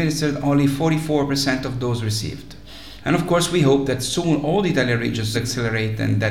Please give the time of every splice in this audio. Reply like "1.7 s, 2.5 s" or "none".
3.0 s, 5.3 s